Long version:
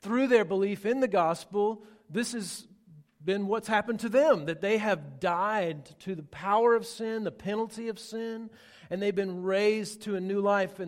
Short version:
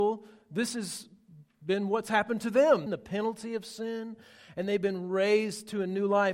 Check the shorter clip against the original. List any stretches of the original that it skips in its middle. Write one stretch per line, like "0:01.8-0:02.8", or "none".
0:04.4-0:07.2